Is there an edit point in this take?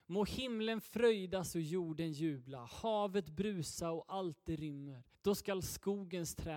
yes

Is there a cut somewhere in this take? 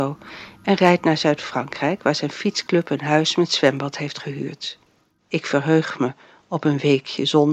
yes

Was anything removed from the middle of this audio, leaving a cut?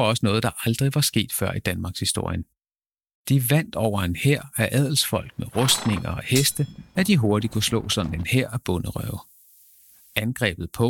yes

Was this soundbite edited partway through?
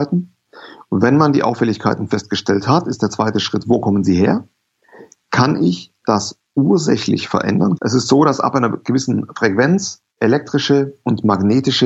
yes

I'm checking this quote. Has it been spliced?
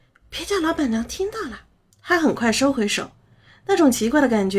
yes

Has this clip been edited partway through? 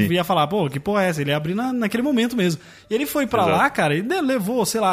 no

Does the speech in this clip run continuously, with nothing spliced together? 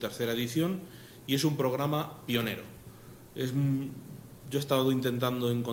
yes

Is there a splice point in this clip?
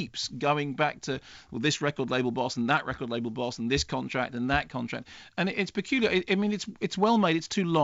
no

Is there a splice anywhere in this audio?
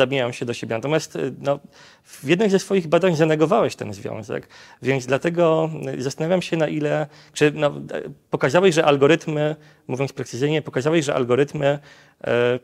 no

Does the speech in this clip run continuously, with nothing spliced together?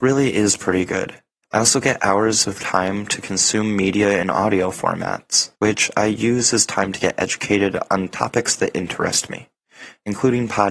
no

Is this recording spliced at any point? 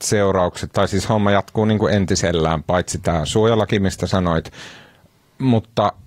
no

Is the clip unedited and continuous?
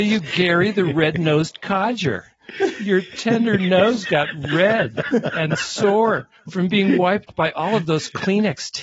yes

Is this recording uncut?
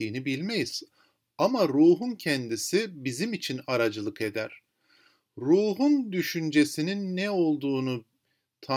yes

